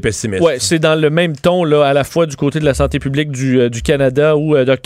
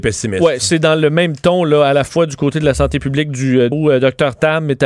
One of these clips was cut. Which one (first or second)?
second